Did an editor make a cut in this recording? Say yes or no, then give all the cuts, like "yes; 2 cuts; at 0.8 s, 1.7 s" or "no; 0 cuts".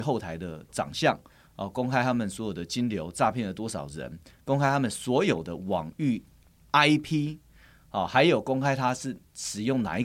no; 0 cuts